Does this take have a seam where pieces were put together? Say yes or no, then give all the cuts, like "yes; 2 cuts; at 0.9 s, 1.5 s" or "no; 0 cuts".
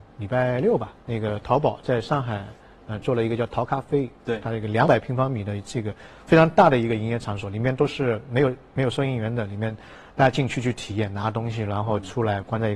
yes; 1 cut; at 1.0 s